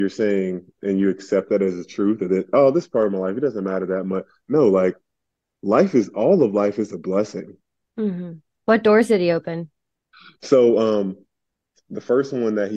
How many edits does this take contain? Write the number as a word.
one